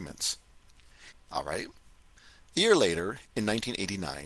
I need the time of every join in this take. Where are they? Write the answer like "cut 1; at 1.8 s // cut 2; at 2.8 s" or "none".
cut 1; at 1.1 s